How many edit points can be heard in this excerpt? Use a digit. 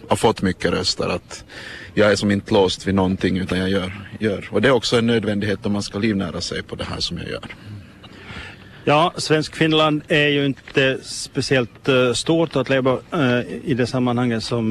0